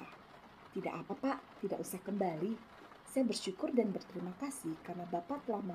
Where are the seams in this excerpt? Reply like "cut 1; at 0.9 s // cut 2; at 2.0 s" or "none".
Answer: none